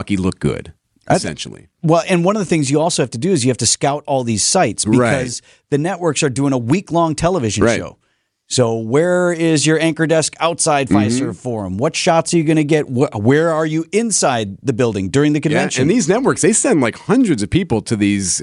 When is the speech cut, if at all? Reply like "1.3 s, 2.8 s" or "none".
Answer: none